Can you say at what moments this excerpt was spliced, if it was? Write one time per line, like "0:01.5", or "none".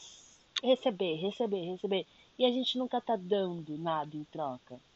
none